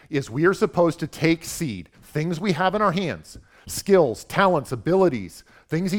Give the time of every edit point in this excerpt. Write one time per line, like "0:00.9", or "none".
0:01.9